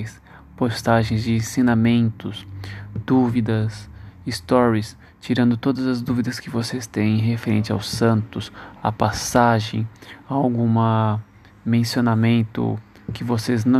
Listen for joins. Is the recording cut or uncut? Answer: uncut